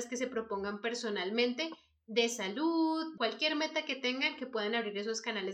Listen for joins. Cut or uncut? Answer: cut